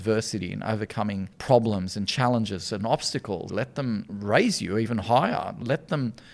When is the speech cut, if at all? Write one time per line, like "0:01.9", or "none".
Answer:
0:03.5